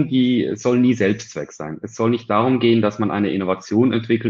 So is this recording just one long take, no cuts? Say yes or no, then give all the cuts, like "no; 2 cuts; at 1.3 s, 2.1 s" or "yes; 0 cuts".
yes; 0 cuts